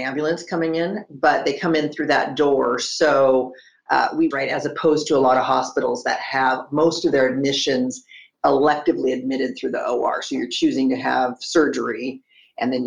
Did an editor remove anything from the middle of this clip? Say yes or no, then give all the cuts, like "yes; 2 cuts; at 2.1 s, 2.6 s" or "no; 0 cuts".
yes; 1 cut; at 4.3 s